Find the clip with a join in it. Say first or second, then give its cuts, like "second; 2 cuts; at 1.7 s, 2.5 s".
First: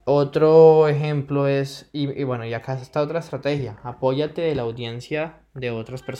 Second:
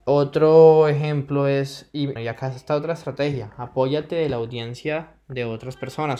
second; 1 cut; at 2.2 s